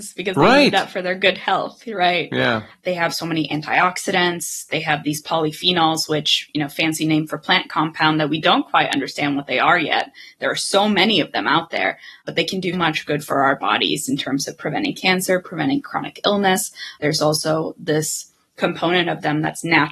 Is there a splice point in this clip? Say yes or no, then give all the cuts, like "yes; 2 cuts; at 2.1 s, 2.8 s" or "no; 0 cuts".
yes; 2 cuts; at 2.8 s, 12.7 s